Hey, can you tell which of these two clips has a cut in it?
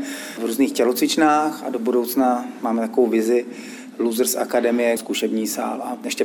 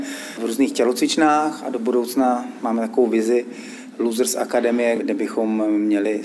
first; 1 cut; at 5.0 s

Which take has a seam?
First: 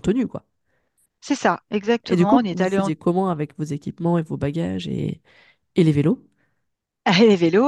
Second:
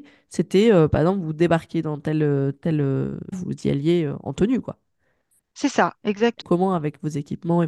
second; 2 cuts; at 3.3 s, 6.4 s

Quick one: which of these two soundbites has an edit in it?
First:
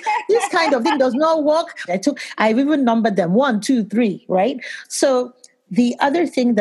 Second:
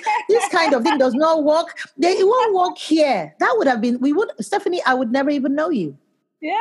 first; 1 cut; at 1.9 s

